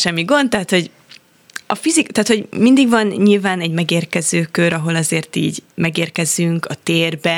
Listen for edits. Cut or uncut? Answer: cut